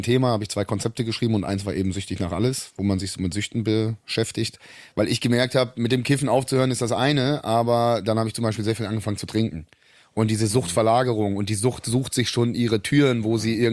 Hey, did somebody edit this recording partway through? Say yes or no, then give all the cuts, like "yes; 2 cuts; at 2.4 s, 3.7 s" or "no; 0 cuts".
no; 0 cuts